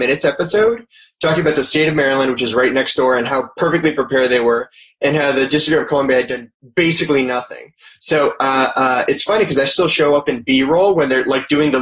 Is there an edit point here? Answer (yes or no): no